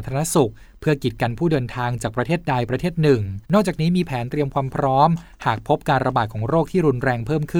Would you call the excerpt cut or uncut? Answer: cut